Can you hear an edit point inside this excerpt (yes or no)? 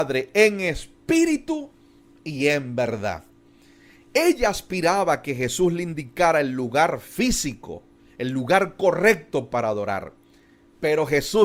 no